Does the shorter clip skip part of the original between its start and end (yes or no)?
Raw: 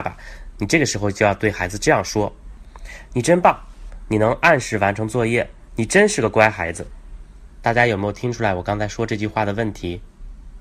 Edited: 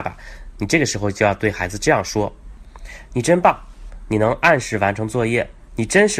no